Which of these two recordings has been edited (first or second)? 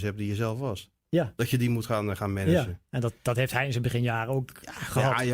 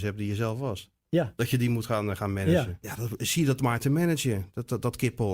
second